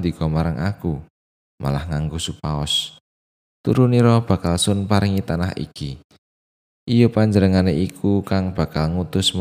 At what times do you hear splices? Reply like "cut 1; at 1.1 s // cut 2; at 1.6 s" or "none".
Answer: none